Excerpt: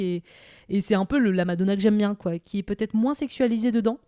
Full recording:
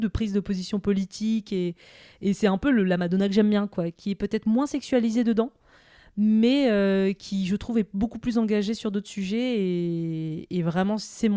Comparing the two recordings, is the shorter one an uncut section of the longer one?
yes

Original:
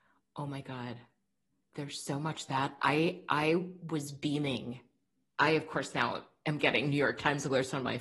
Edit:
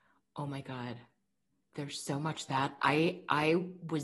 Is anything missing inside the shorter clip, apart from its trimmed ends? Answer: no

